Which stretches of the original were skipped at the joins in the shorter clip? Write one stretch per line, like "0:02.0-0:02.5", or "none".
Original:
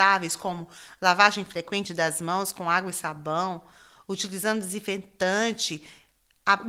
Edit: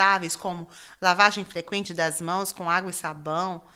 none

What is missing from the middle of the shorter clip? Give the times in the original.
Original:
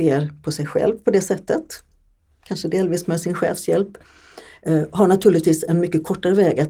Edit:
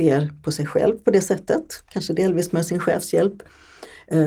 0:01.8-0:02.4

